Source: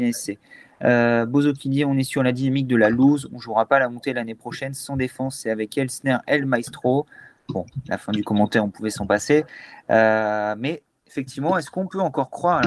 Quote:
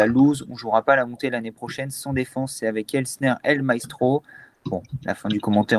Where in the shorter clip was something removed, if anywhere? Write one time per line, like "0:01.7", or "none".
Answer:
none